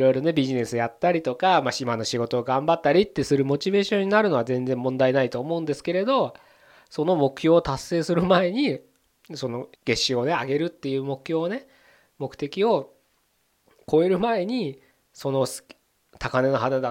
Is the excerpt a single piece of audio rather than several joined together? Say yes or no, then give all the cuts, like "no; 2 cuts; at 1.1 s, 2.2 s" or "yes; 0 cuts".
no; 1 cut; at 9.7 s